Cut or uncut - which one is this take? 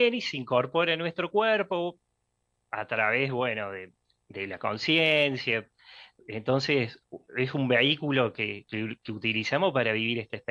uncut